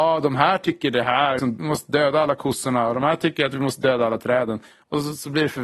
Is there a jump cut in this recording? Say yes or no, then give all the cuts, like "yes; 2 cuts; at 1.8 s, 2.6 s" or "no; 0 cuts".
yes; 1 cut; at 1.4 s